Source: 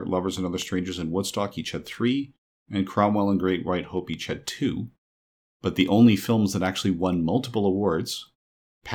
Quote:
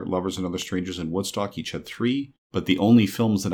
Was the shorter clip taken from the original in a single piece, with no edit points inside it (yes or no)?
no